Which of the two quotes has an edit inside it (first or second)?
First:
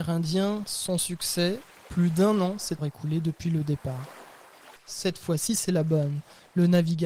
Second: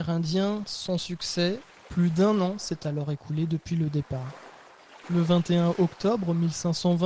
first